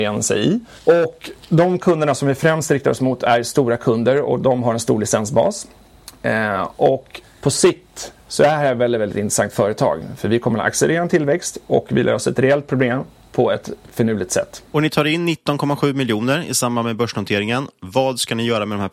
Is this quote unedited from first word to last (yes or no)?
yes